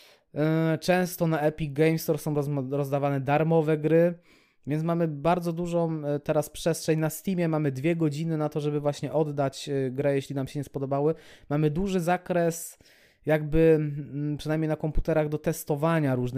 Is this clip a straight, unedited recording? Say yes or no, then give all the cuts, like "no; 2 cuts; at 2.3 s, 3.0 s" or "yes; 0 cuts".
yes; 0 cuts